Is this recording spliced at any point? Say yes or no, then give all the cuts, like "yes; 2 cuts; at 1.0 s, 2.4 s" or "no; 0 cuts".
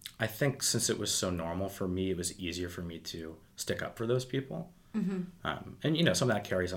no; 0 cuts